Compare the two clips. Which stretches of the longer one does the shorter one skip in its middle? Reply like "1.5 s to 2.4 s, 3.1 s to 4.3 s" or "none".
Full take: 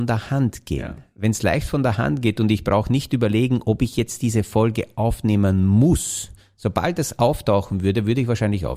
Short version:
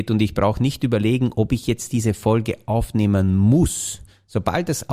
none